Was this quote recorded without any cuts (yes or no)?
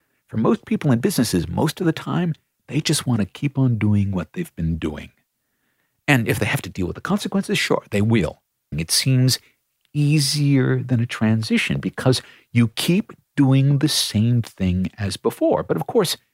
no